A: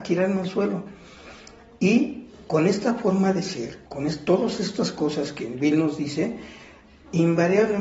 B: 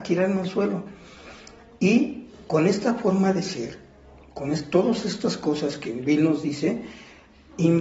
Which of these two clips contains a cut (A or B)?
A